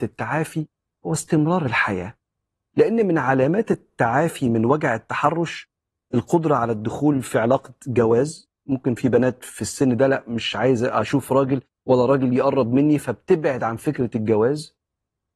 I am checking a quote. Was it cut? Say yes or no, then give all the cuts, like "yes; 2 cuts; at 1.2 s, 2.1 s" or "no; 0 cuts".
no; 0 cuts